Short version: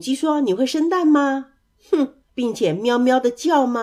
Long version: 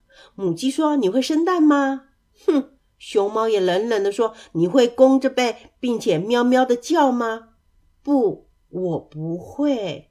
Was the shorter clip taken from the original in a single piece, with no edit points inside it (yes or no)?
no